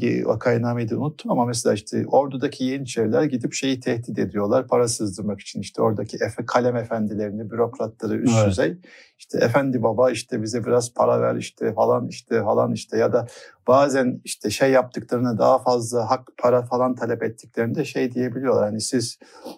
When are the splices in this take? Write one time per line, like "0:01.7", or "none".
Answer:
none